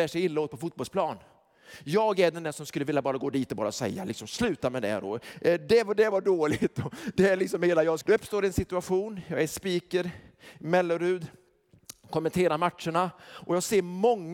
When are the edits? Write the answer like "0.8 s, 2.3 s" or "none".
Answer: 8.0 s